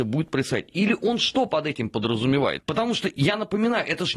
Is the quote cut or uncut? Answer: cut